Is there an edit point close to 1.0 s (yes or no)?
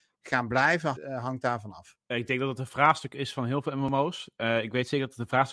yes